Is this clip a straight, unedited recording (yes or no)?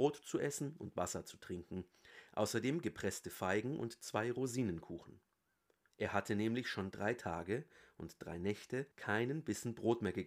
no